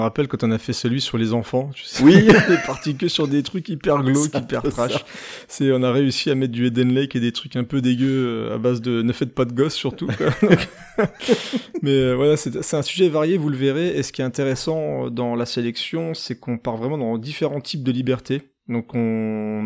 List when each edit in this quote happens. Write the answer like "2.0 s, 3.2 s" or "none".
none